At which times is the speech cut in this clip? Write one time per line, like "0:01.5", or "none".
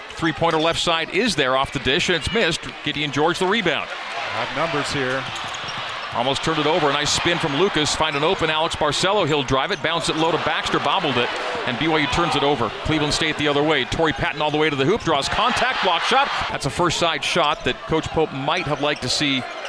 0:16.5